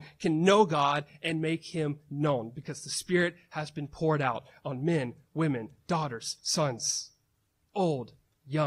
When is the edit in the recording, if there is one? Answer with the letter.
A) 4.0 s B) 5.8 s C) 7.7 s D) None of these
D